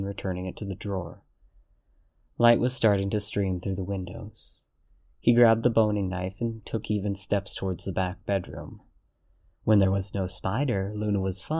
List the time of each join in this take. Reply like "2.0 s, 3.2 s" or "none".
none